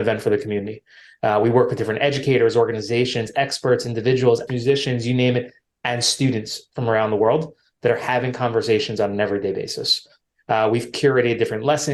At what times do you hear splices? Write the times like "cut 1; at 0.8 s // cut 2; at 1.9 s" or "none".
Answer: cut 1; at 4.5 s